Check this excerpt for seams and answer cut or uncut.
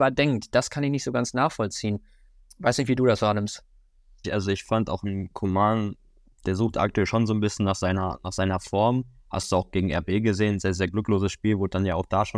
cut